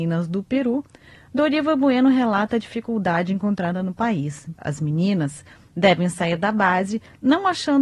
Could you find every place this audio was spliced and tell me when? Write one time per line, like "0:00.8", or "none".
0:04.6